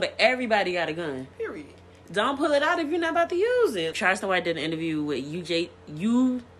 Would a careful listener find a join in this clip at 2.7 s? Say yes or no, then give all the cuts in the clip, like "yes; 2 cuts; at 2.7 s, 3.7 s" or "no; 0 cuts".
no; 2 cuts; at 1.3 s, 3.9 s